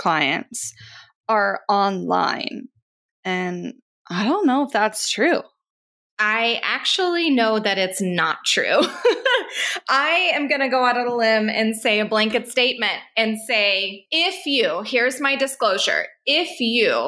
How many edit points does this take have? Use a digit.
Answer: 0